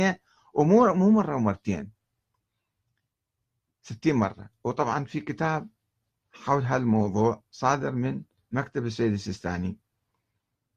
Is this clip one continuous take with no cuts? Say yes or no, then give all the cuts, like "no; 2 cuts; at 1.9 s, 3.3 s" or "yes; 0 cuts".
yes; 0 cuts